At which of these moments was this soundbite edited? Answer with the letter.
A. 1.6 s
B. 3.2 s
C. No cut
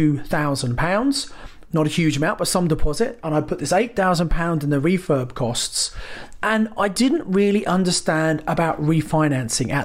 A